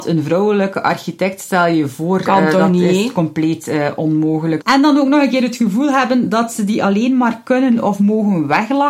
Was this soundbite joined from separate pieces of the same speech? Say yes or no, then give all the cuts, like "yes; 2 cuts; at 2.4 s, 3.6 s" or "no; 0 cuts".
yes; 1 cut; at 4.6 s